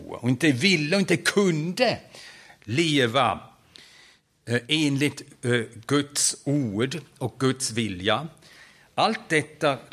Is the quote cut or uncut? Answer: uncut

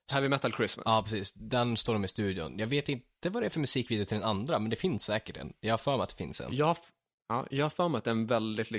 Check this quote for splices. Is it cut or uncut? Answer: uncut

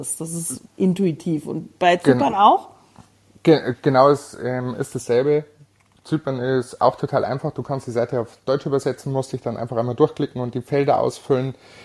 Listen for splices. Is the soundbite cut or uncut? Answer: uncut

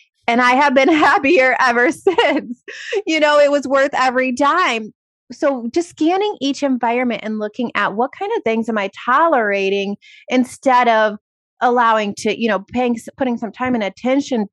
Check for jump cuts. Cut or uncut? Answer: uncut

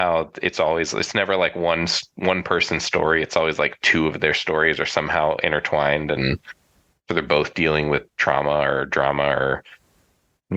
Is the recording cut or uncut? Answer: uncut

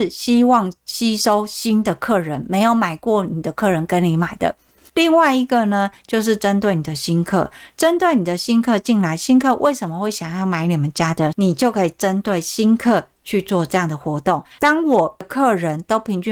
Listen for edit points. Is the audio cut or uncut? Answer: cut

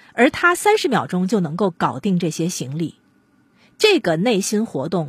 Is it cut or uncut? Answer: uncut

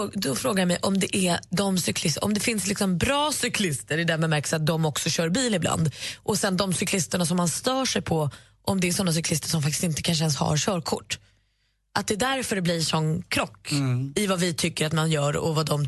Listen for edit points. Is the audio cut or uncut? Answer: uncut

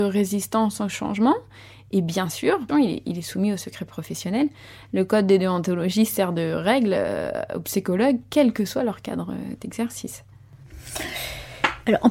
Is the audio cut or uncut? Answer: cut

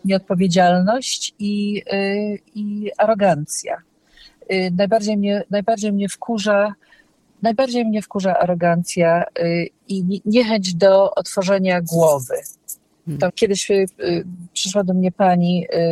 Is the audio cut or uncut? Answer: cut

